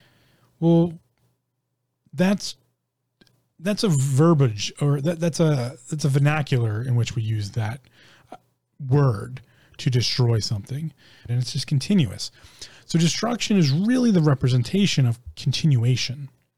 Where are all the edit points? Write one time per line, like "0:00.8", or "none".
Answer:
0:11.3